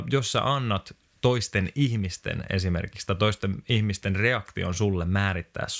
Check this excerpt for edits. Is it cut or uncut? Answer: uncut